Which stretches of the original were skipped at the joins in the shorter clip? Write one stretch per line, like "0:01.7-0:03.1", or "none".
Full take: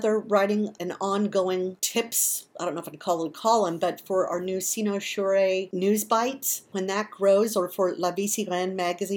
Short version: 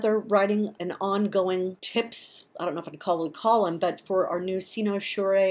none